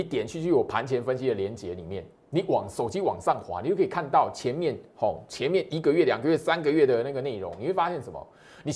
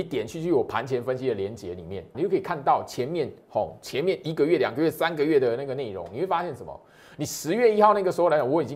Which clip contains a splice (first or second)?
second